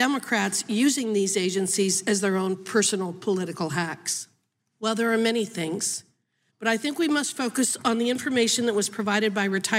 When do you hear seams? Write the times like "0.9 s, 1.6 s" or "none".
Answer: 4.6 s